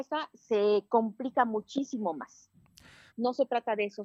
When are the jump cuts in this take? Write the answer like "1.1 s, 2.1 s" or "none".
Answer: 3.1 s